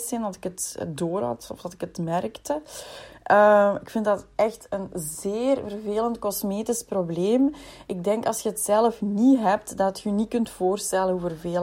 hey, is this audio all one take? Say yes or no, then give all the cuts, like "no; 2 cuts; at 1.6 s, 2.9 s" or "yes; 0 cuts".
yes; 0 cuts